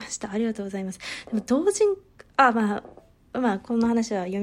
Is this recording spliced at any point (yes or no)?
no